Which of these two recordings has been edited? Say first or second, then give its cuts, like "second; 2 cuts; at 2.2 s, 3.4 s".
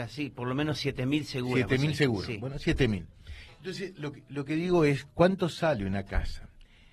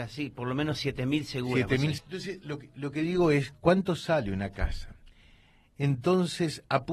second; 1 cut; at 2.0 s